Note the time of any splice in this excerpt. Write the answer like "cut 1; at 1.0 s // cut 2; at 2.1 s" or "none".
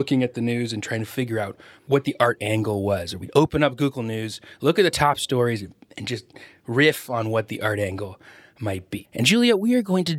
cut 1; at 9.0 s